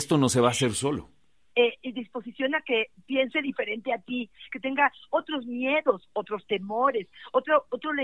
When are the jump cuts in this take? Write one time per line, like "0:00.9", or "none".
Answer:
0:01.5
0:04.5